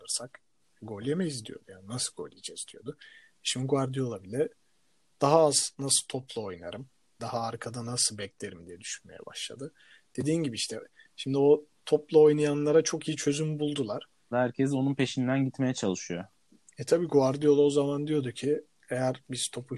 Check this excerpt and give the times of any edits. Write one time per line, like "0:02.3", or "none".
0:07.2
0:14.3